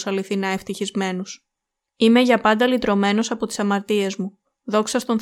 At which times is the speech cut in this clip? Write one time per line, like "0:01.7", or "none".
0:01.9